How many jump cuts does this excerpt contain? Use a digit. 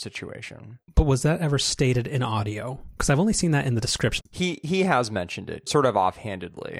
2